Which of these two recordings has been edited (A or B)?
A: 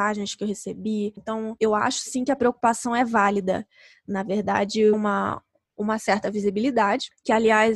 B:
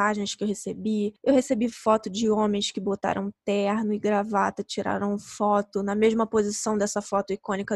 A